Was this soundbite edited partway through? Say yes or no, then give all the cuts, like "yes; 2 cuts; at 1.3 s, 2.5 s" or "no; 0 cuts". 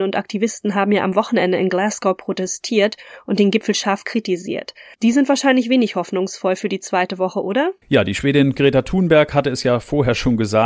yes; 1 cut; at 7.8 s